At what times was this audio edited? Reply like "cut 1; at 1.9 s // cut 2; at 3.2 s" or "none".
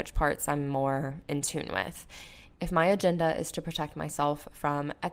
cut 1; at 2.5 s